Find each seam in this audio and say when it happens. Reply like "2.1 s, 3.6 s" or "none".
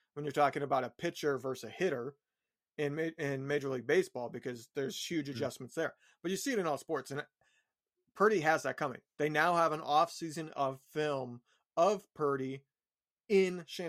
none